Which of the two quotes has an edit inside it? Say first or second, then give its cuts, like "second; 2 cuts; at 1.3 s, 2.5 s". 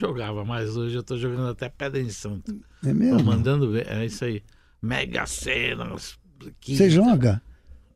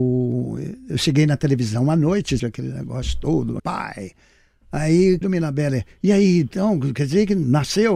second; 3 cuts; at 2.4 s, 3.6 s, 5.2 s